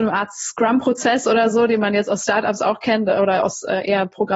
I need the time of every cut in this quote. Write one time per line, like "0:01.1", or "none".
none